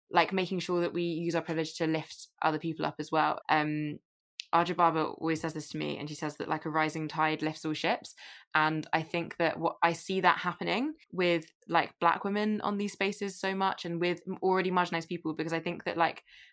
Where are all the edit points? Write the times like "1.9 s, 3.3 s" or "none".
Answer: 3.4 s, 11.0 s